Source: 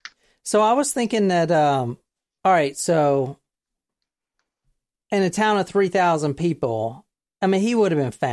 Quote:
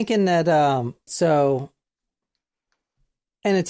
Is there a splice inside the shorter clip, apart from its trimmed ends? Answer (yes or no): yes